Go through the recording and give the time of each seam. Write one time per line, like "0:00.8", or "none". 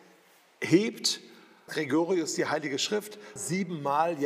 0:01.7
0:03.4